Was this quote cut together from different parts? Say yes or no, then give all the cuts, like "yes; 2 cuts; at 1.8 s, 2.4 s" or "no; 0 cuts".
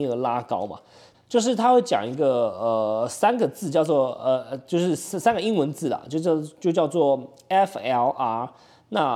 yes; 1 cut; at 1.1 s